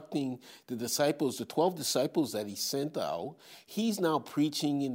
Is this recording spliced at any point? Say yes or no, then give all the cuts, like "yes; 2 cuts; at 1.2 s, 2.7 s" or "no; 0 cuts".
no; 0 cuts